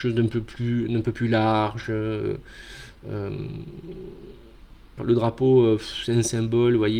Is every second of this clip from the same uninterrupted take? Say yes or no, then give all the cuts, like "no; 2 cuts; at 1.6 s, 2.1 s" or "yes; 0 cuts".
no; 1 cut; at 5.0 s